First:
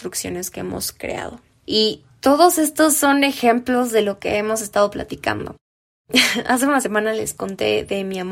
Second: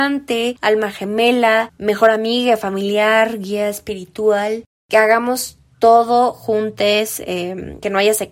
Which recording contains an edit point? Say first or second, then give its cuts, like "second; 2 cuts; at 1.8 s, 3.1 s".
first; 1 cut; at 1.6 s